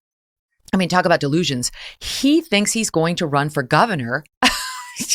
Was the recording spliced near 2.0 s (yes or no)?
no